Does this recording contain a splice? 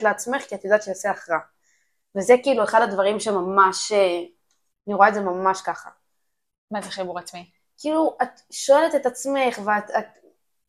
yes; 1 cut; at 4.7 s

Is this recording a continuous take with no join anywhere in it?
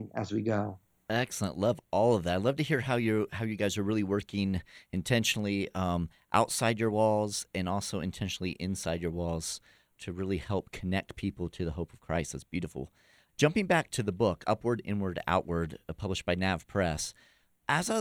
yes; 0 cuts

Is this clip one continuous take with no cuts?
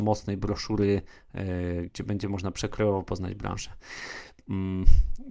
no; 1 cut; at 1.9 s

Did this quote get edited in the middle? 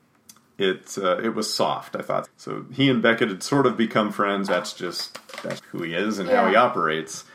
yes; 3 cuts; at 2.2 s, 4.5 s, 5.6 s

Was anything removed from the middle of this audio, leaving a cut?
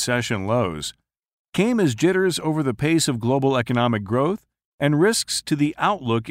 no; 0 cuts

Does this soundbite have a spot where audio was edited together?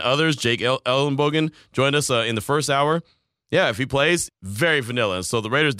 yes; 1 cut; at 4.3 s

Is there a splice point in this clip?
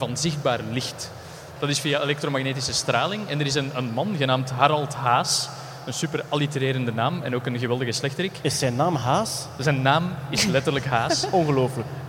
yes; 1 cut; at 1.6 s

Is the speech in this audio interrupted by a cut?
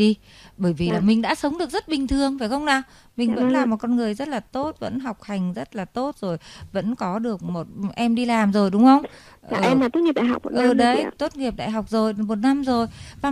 no; 0 cuts

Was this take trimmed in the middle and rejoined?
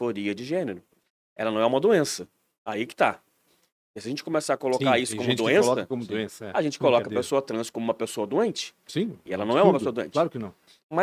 no; 0 cuts

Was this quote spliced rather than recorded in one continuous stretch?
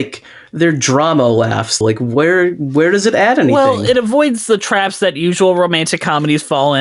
yes; 1 cut; at 1.8 s

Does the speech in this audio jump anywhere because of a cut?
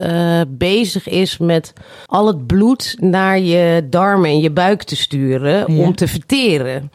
yes; 1 cut; at 2.1 s

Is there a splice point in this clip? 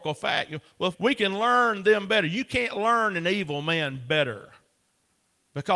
yes; 1 cut; at 0.9 s

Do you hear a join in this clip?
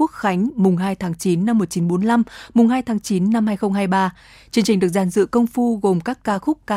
no; 0 cuts

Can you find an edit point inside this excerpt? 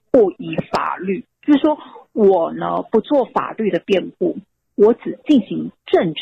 no; 0 cuts

